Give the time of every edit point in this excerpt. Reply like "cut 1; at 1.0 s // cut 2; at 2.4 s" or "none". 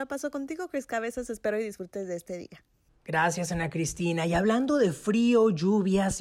none